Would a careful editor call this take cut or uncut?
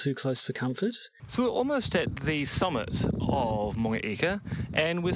cut